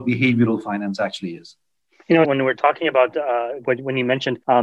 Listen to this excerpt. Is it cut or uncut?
cut